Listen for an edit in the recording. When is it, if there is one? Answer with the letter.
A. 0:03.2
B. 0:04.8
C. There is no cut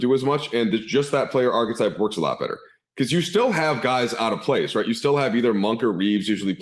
C